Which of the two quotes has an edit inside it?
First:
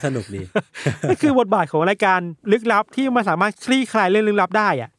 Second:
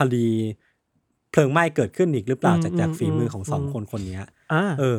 first; 1 cut; at 2.4 s

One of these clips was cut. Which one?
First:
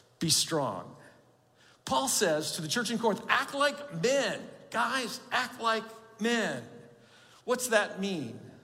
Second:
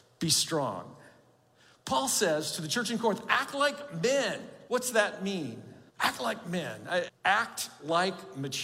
second; 3 cuts; at 4.7 s, 5.9 s, 7.1 s

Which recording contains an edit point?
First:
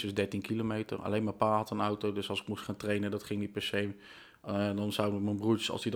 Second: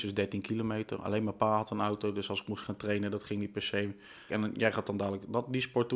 second; 1 cut; at 4.3 s

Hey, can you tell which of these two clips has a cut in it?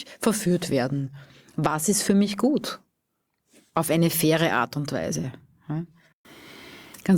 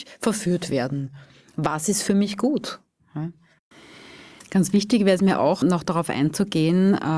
second; 2 cuts; at 3.0 s, 5.6 s

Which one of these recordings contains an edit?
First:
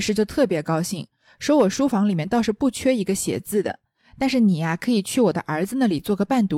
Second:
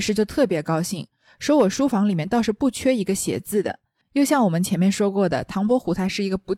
second; 1 cut; at 4.0 s

